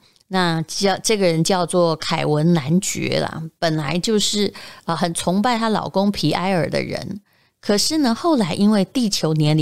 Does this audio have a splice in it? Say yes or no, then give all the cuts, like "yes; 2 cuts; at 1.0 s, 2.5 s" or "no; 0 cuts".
no; 0 cuts